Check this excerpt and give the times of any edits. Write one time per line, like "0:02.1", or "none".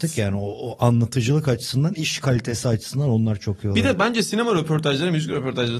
none